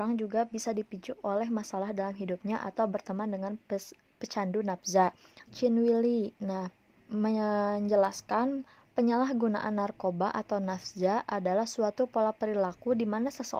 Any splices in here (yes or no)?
yes